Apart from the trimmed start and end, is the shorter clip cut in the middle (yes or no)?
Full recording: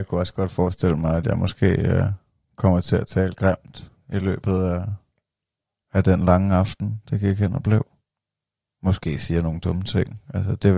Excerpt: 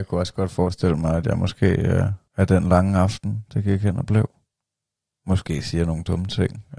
yes